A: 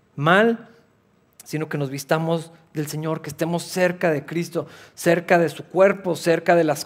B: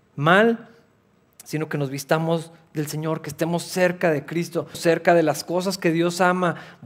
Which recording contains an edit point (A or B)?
B